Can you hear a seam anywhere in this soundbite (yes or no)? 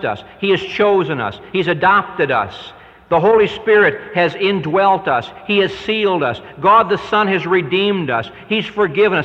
no